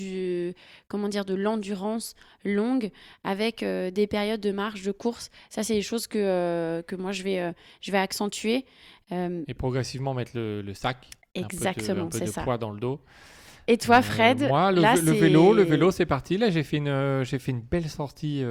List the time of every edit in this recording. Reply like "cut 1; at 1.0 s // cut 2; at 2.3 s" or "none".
none